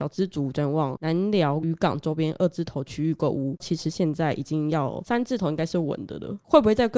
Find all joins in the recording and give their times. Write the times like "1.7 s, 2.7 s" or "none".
3.6 s